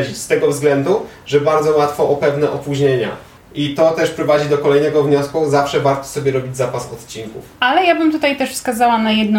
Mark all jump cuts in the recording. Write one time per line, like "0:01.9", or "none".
0:03.4
0:07.5